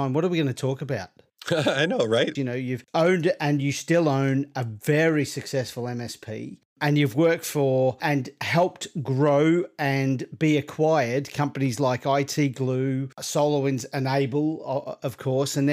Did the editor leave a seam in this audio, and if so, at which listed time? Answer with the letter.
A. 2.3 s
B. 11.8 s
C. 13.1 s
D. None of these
A